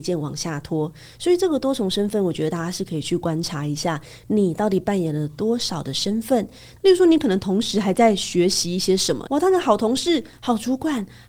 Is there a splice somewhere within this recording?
yes; 2 cuts; at 6.8 s, 9.3 s

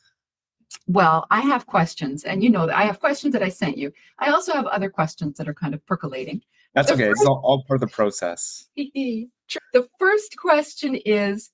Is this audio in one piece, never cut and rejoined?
no; 2 cuts; at 6.7 s, 9.6 s

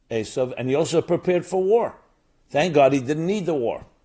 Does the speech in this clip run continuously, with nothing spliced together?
yes; 0 cuts

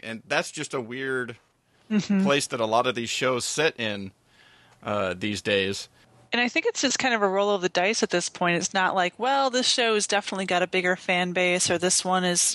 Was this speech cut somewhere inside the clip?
no; 0 cuts

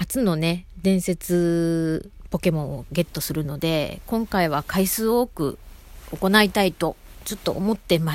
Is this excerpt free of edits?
yes; 0 cuts

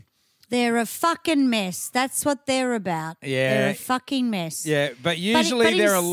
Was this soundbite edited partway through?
no; 0 cuts

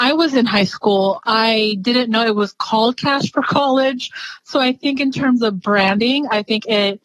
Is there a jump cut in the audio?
no; 0 cuts

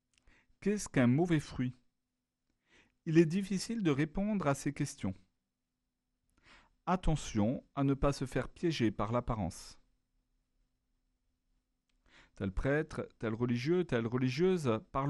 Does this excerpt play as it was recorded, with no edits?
yes; 0 cuts

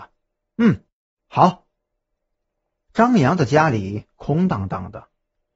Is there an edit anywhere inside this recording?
no; 0 cuts

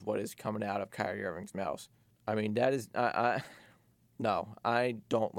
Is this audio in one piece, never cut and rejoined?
no; 1 cut; at 2.1 s

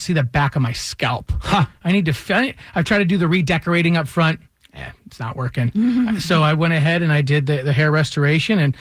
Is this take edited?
no; 0 cuts

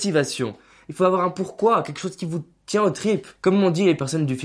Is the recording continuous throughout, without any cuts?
no; 1 cut; at 3.4 s

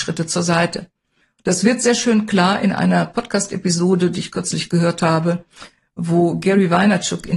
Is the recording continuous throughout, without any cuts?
yes; 0 cuts

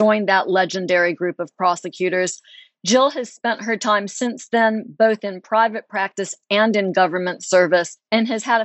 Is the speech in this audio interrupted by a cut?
no; 0 cuts

